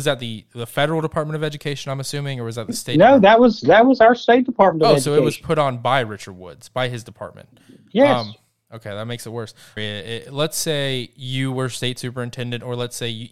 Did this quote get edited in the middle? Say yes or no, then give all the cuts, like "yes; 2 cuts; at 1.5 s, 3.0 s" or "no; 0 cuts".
yes; 1 cut; at 9.8 s